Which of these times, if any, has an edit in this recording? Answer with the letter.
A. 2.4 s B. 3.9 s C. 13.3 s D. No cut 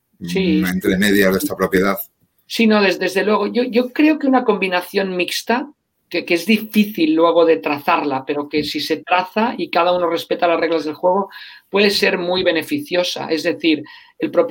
D